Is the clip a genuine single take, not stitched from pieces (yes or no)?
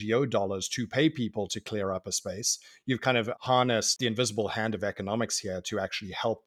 yes